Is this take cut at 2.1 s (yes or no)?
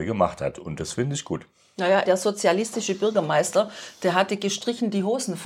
yes